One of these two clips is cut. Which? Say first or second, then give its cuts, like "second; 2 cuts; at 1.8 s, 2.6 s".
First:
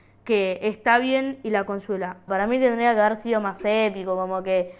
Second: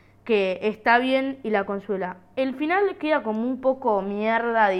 first; 1 cut; at 2.3 s